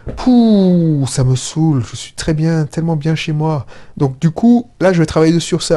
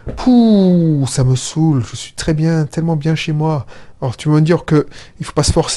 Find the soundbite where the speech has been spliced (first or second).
first